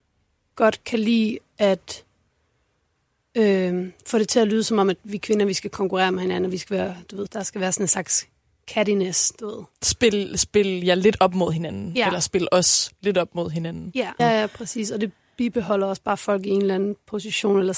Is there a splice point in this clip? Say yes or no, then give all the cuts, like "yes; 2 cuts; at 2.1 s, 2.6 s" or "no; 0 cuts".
yes; 2 cuts; at 7.3 s, 14.2 s